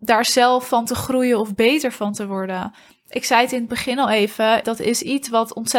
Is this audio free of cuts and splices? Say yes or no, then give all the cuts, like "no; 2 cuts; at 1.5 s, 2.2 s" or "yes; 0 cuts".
no; 1 cut; at 4.6 s